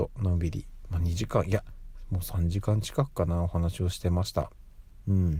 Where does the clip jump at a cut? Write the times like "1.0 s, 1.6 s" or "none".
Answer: none